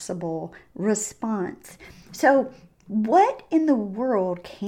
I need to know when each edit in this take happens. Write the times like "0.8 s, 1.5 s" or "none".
none